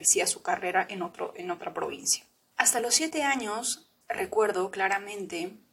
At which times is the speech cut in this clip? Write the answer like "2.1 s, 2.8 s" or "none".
2.5 s, 4.0 s